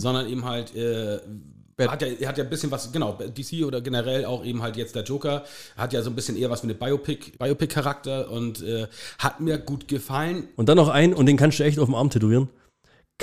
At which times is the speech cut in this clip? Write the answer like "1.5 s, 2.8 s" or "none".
7.3 s, 10.5 s

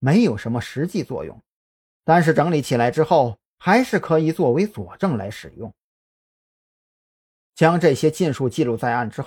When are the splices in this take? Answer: none

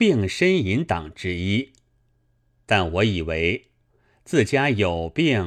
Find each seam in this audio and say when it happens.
none

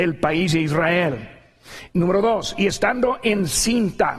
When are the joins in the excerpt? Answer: none

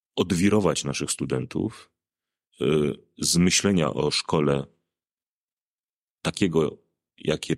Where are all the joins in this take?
none

